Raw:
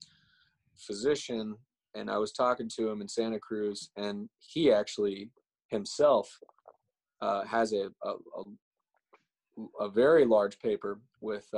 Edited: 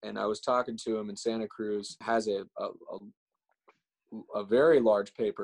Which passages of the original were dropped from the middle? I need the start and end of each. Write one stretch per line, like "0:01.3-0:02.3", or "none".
0:03.9-0:07.5